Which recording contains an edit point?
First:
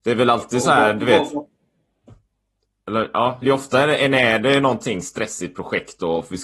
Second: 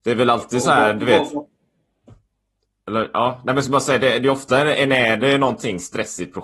first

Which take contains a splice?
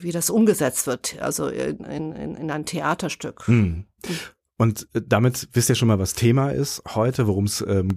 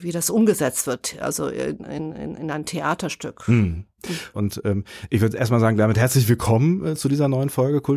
second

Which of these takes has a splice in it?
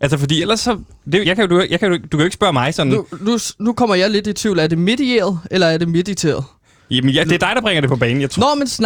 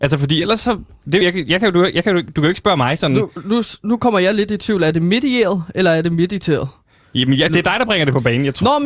first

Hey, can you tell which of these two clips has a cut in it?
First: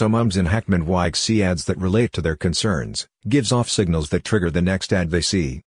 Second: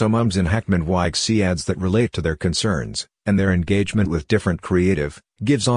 first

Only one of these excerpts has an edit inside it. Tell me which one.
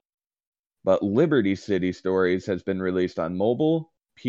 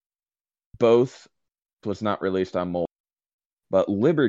second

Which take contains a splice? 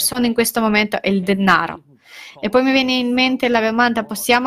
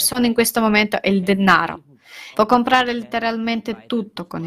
second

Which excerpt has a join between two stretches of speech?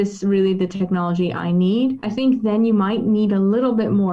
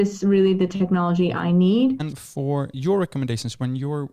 second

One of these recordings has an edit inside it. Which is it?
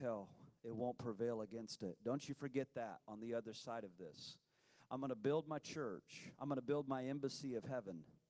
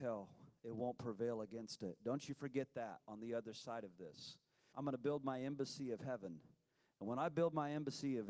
second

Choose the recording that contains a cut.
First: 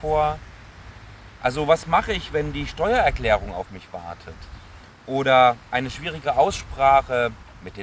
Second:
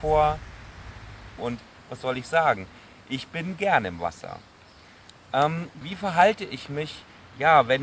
second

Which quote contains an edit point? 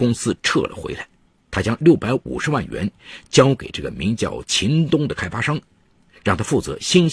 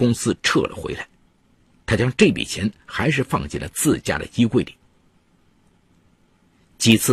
first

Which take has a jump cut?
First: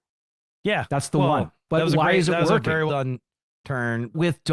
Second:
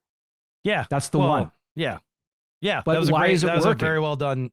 first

